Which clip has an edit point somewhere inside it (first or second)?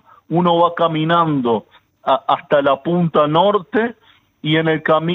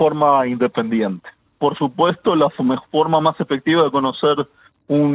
second